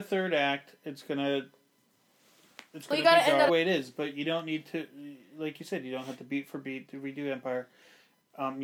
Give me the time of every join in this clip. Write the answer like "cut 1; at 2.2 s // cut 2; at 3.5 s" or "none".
cut 1; at 3.5 s